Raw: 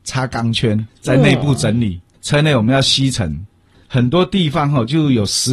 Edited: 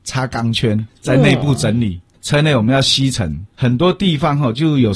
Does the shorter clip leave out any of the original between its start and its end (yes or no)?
yes